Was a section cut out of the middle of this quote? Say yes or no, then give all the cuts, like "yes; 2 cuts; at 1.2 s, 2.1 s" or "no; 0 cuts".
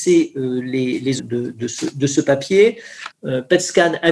yes; 2 cuts; at 1.2 s, 3.1 s